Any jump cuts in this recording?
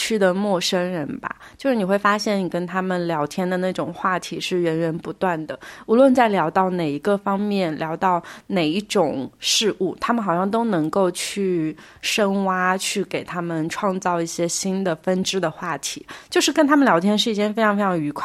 no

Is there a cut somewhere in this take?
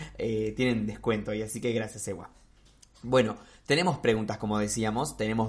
no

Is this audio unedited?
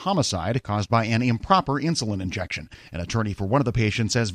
yes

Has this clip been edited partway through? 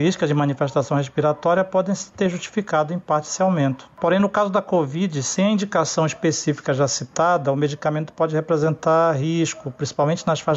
no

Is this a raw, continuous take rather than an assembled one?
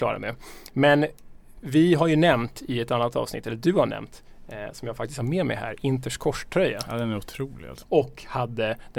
no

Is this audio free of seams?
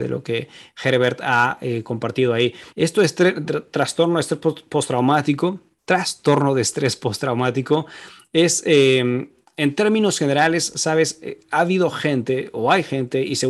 no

